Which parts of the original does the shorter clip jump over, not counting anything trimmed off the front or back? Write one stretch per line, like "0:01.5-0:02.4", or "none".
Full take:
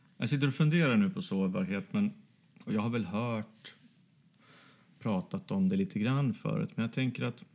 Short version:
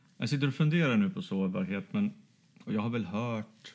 none